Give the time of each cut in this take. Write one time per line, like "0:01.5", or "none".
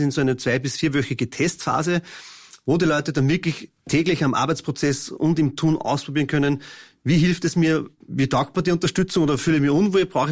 0:03.8
0:08.0